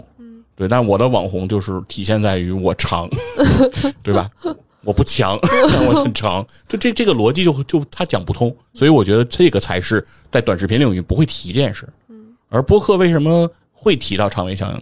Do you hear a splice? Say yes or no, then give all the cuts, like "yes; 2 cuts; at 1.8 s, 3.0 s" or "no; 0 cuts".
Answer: no; 0 cuts